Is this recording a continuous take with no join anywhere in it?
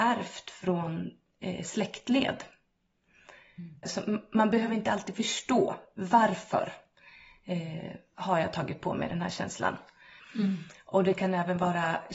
no; 2 cuts; at 3.8 s, 10.2 s

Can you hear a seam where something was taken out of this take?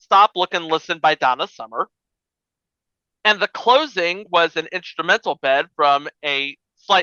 no; 0 cuts

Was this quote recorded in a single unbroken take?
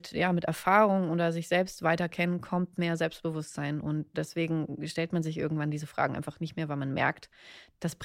yes; 0 cuts

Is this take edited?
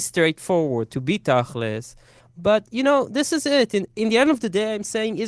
no; 0 cuts

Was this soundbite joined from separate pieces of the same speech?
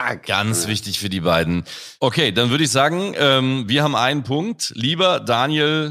no; 0 cuts

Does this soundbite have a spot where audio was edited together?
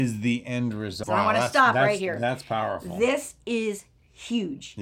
yes; 1 cut; at 1.0 s

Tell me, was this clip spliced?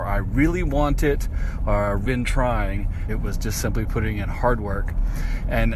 yes; 2 cuts; at 2.1 s, 3.1 s

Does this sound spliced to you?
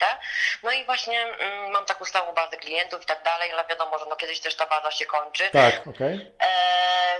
yes; 1 cut; at 5.8 s

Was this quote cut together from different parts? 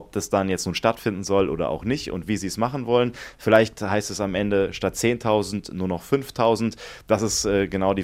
no; 0 cuts

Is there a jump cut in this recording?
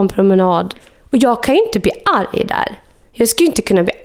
no; 0 cuts

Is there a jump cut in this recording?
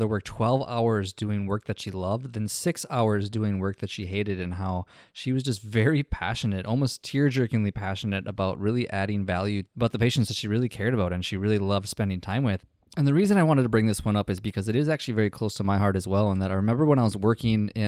no; 0 cuts

